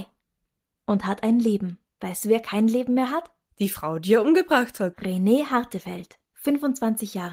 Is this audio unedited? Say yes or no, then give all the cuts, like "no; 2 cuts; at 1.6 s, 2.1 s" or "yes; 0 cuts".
yes; 0 cuts